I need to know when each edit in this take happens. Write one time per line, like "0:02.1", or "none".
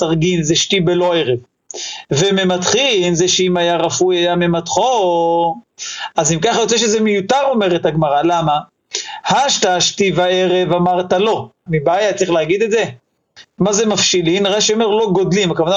0:11.7
0:13.5